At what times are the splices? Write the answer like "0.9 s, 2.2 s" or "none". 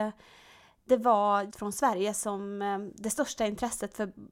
1.5 s